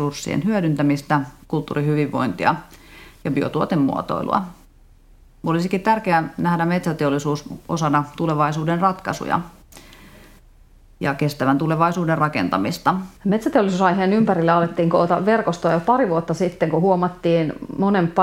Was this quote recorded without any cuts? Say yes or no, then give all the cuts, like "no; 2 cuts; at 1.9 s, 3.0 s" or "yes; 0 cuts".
no; 1 cut; at 13.2 s